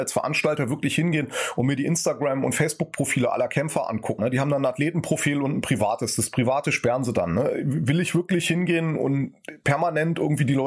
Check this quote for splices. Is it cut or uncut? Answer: cut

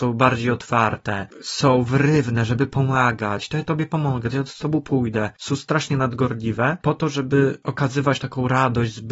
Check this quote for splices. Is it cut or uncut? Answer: uncut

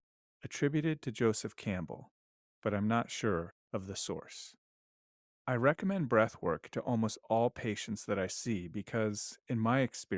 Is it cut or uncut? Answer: uncut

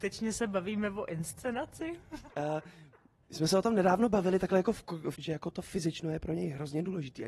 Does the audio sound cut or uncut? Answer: cut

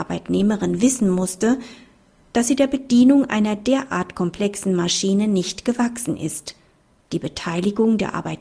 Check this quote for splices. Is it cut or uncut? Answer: cut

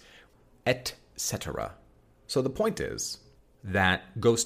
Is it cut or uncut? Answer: uncut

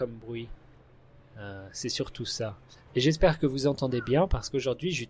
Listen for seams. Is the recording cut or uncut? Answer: uncut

